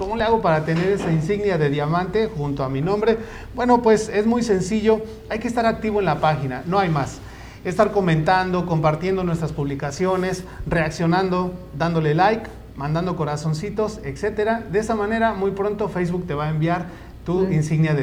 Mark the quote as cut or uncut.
uncut